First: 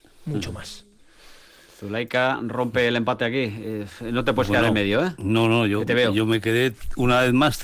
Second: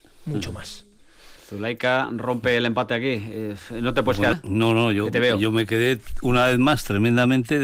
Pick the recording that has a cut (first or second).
second